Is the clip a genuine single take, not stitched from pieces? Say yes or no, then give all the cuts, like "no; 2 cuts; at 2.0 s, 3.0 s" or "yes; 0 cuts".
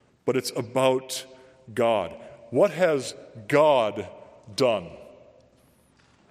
yes; 0 cuts